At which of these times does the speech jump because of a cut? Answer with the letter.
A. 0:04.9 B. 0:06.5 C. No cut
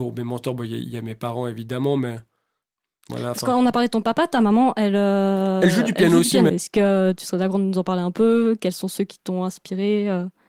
B